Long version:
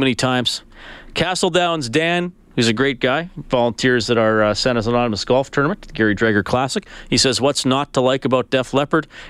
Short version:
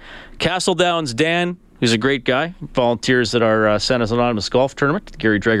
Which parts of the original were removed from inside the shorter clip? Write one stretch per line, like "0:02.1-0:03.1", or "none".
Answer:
none